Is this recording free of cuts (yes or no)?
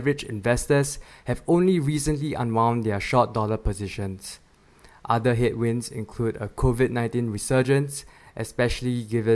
yes